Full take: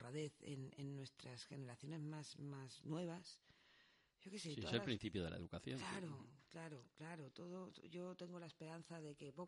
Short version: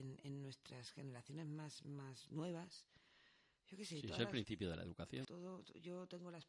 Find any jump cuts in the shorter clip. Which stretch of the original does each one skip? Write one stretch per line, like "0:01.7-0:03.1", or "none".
0:05.8-0:07.3